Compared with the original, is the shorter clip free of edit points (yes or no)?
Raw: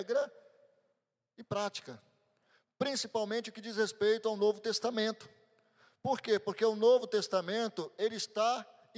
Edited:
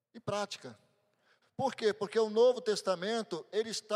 no